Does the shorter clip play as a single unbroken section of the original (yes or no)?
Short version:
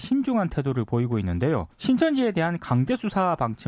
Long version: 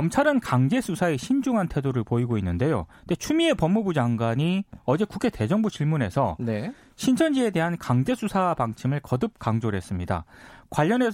no